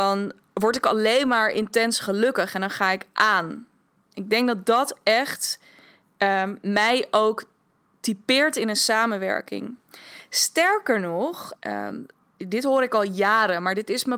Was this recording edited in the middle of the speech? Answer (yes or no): yes